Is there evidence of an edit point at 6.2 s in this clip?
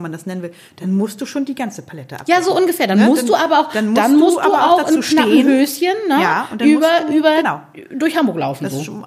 no; 0 cuts

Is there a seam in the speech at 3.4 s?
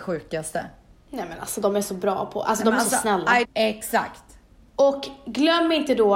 yes; 1 cut; at 3.4 s

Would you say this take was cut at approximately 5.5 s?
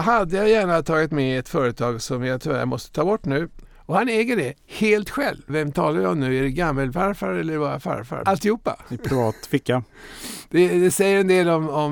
yes; 3 cuts; at 3.6 s, 5.5 s, 8.2 s

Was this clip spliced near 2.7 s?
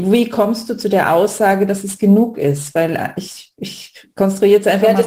no; 0 cuts

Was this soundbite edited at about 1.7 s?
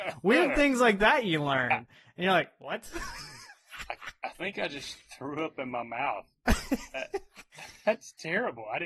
no; 0 cuts

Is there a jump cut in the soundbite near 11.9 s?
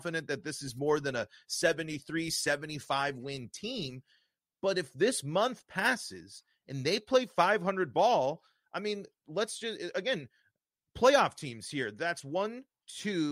no; 0 cuts

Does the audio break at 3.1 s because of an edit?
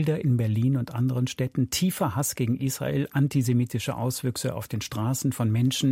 no; 0 cuts

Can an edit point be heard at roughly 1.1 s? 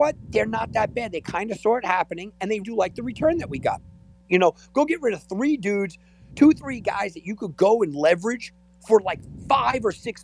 no; 2 cuts; at 2.6 s, 4.3 s

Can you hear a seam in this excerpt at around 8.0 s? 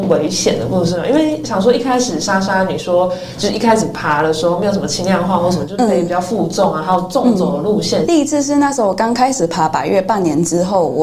yes; 1 cut; at 8.0 s

